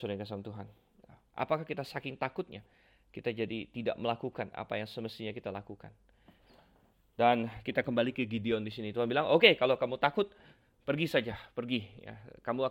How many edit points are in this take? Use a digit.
0